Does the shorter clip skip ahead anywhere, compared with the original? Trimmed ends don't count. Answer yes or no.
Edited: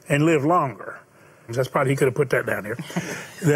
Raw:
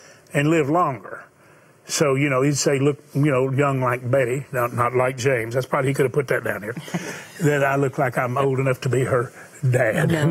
yes